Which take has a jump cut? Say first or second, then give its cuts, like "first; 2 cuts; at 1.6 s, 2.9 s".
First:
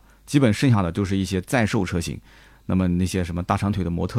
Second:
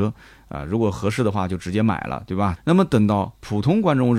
second; 1 cut; at 2.6 s